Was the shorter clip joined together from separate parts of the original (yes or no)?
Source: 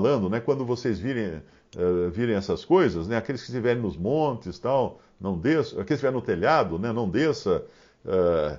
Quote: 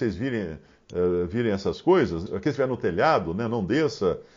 yes